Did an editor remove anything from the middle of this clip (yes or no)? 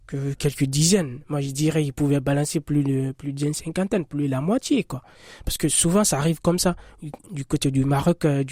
no